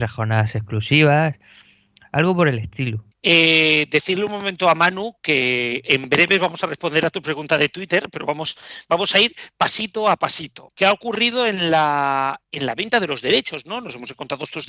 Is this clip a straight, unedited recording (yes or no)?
no